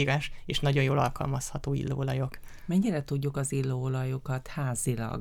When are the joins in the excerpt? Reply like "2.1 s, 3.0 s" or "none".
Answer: none